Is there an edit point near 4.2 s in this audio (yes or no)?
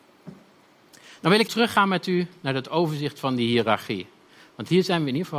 no